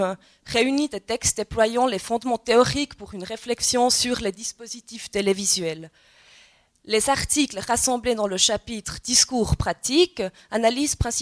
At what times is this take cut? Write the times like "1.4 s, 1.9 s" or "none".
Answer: none